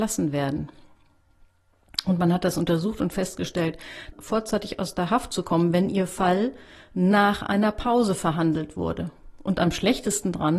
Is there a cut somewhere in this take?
yes; 1 cut; at 4.1 s

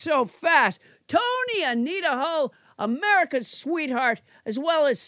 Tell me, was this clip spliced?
no; 0 cuts

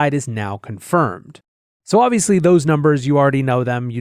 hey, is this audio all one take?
no; 1 cut; at 1.7 s

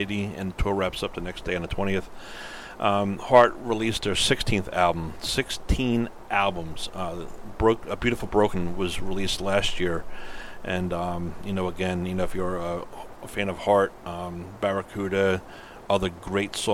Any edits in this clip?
no; 0 cuts

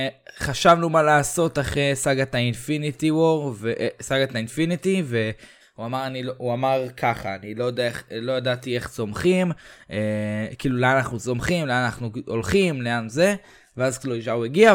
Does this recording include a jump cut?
yes; 1 cut; at 5.6 s

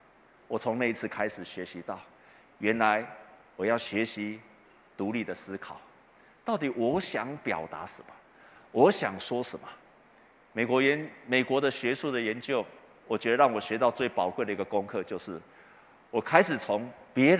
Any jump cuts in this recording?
no; 0 cuts

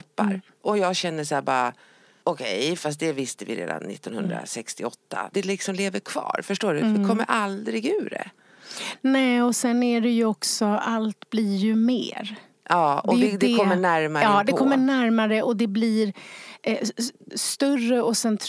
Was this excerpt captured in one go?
no; 1 cut; at 5.3 s

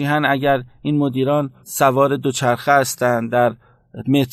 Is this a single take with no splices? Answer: no; 1 cut; at 1.6 s

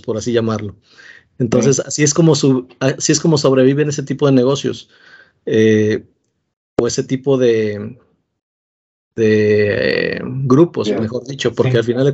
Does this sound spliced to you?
no; 0 cuts

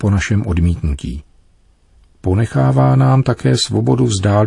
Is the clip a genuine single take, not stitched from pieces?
yes; 0 cuts

